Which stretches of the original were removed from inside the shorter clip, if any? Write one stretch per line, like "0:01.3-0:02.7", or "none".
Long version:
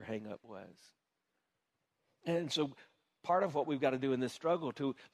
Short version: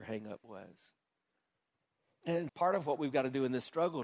0:02.5-0:03.2